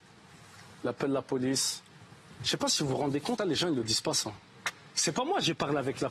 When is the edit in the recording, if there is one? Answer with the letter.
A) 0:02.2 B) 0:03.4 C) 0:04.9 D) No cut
B